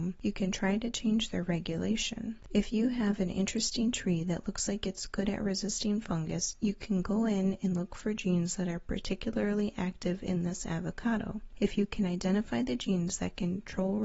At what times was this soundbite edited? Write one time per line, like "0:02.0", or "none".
0:02.4